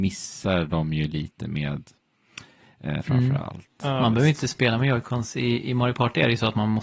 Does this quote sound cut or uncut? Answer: cut